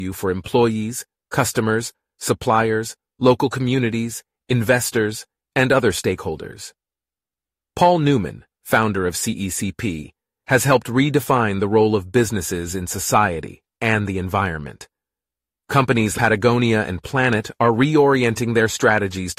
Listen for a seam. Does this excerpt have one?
yes; 1 cut; at 16.1 s

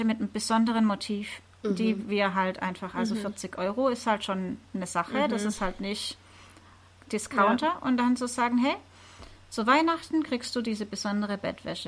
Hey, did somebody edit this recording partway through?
no; 0 cuts

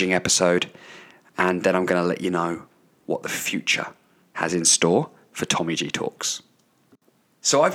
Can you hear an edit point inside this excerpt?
no; 0 cuts

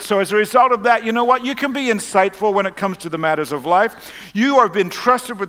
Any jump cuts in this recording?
no; 0 cuts

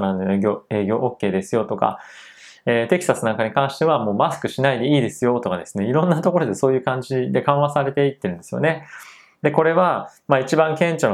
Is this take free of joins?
yes; 0 cuts

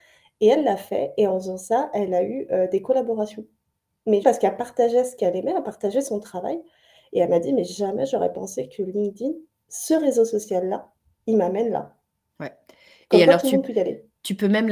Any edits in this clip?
yes; 1 cut; at 4.2 s

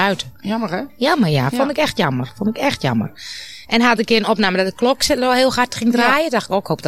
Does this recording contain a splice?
no; 0 cuts

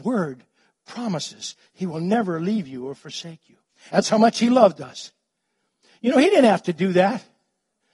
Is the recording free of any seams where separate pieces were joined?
no; 1 cut; at 3.9 s

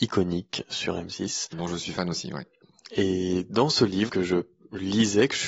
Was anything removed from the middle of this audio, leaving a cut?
yes; 1 cut; at 4.1 s

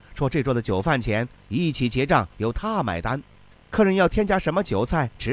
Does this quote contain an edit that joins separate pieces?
no; 0 cuts

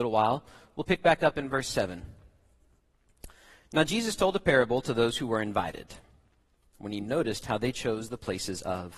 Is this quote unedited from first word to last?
yes; 0 cuts

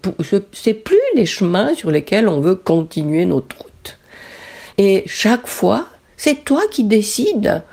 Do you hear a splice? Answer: yes; 1 cut; at 4.7 s

